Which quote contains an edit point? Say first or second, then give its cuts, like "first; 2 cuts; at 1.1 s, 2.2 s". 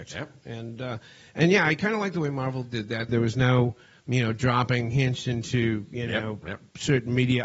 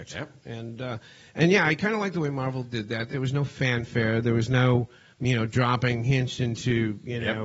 first; 1 cut; at 3.1 s